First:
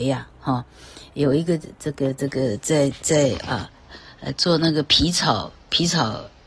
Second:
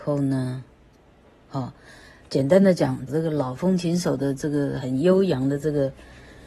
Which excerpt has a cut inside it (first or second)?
second